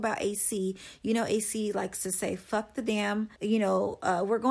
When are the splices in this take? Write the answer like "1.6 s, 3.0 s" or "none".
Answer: 3.3 s